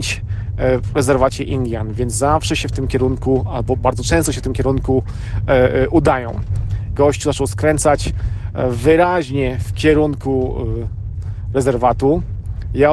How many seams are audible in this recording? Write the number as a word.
one